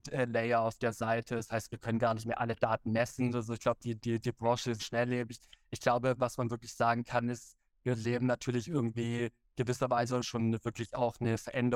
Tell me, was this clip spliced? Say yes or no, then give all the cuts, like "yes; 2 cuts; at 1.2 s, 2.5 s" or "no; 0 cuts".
yes; 3 cuts; at 3.3 s, 4.8 s, 10.2 s